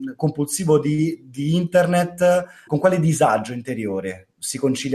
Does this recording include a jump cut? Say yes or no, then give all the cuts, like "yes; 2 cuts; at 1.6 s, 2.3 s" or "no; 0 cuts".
yes; 1 cut; at 2.7 s